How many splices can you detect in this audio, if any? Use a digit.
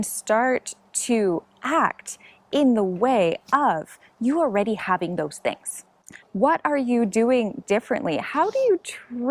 1